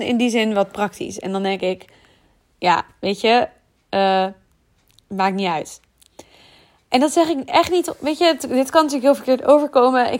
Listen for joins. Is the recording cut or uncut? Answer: uncut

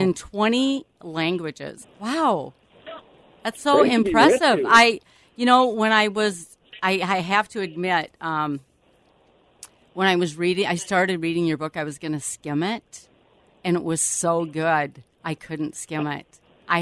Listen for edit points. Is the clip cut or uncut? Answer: cut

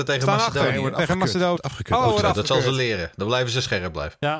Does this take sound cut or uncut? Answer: cut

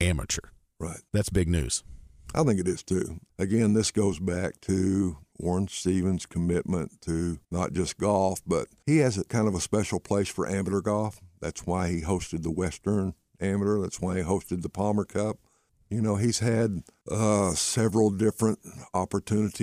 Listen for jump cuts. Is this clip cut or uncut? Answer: uncut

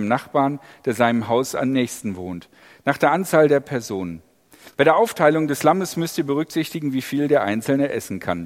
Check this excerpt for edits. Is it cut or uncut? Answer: uncut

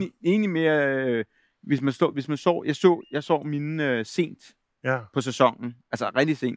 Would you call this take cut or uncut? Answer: uncut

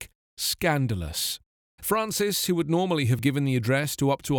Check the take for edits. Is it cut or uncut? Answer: cut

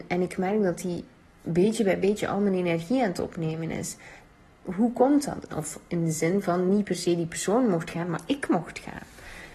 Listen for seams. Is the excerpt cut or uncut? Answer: cut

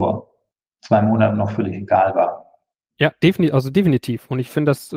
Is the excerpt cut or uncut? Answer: cut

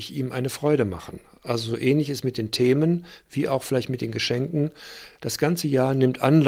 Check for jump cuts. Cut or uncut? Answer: uncut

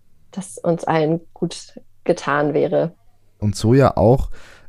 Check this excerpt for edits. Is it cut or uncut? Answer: cut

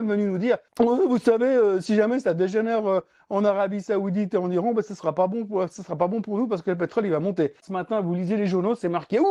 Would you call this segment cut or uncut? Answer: cut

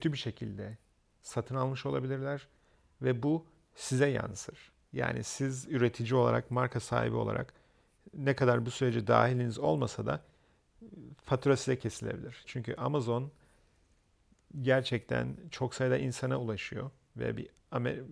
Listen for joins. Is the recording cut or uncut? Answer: cut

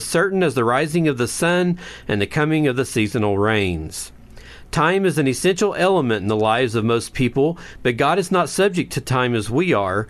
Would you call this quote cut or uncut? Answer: uncut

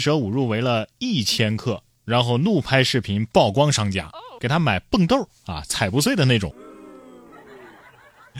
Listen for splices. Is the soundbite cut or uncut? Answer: cut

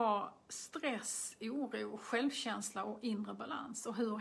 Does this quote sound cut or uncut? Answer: uncut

